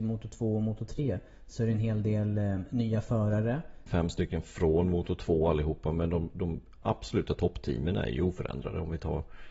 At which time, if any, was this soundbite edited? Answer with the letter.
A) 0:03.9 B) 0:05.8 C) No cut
A